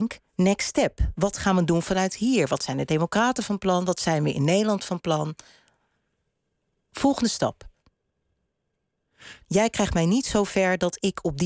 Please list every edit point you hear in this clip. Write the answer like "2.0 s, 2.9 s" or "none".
9.4 s